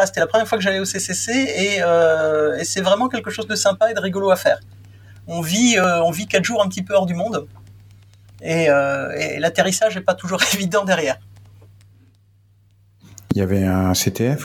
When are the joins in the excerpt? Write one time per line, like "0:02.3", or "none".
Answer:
none